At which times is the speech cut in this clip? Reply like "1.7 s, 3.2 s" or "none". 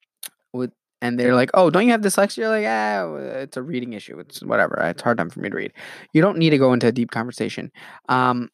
none